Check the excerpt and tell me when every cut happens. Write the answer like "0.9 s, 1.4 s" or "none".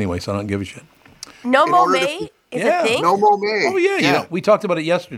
1.4 s

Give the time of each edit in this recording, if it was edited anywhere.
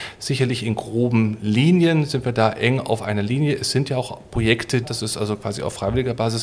4.8 s

